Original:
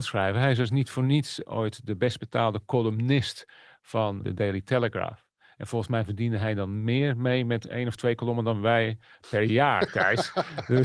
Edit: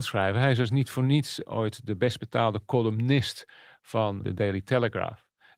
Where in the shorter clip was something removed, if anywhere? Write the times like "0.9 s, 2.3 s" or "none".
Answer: none